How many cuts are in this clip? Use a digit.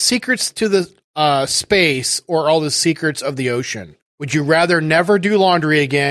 1